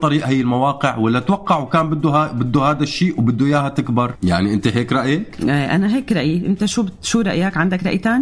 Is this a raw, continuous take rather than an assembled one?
no; 1 cut; at 4.2 s

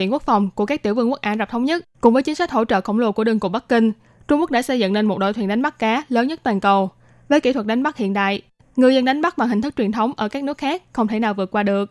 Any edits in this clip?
yes; 1 cut; at 2.0 s

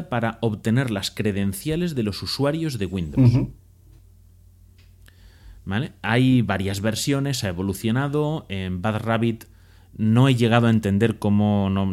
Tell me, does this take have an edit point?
no; 0 cuts

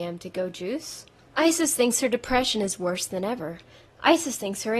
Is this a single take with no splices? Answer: yes; 0 cuts

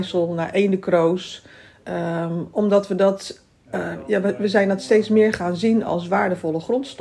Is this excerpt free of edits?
yes; 0 cuts

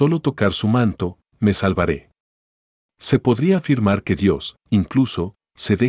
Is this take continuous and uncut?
yes; 0 cuts

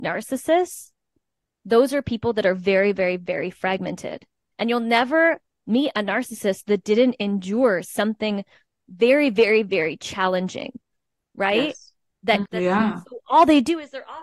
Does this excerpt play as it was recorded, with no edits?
no; 2 cuts; at 4.5 s, 12.4 s

